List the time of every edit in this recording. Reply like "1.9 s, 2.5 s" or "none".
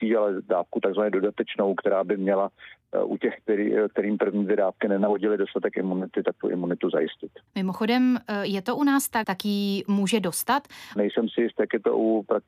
7.5 s, 9.2 s, 11.0 s